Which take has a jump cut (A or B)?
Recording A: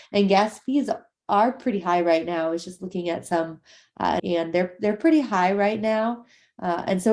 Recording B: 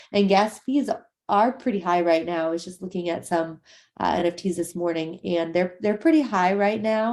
A